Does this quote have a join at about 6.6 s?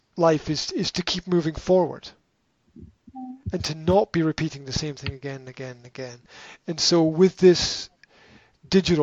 no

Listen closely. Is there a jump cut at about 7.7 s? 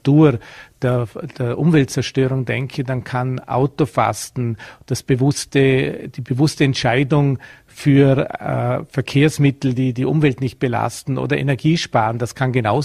no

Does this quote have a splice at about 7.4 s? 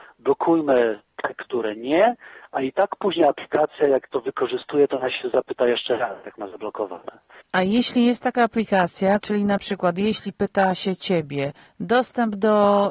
yes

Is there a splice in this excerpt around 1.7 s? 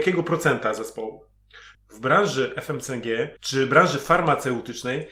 yes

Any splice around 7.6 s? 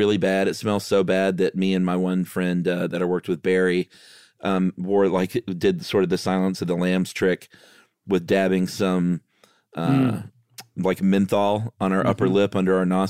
no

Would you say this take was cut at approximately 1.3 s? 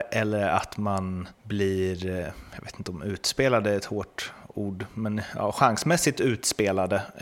yes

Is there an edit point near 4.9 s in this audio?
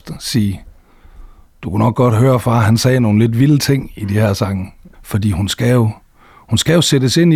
yes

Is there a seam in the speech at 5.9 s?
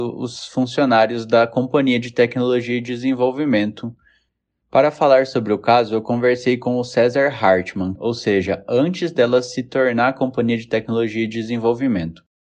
no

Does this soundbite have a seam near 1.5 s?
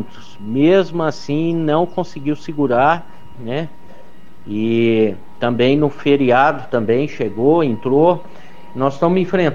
no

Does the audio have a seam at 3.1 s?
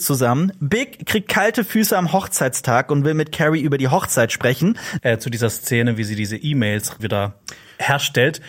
no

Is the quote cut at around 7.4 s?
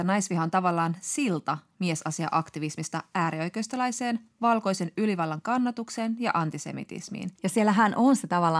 yes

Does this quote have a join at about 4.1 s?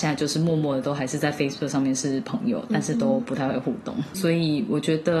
yes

